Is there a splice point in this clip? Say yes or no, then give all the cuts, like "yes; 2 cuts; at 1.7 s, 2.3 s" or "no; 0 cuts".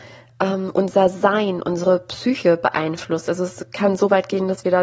no; 0 cuts